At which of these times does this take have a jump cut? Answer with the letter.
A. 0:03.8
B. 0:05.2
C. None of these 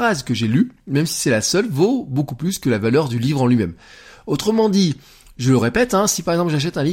C